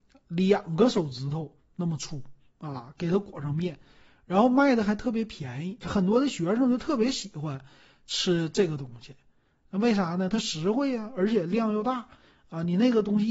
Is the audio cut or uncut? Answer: cut